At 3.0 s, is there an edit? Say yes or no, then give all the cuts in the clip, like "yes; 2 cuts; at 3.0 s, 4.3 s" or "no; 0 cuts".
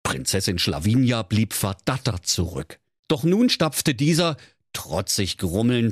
yes; 1 cut; at 3.0 s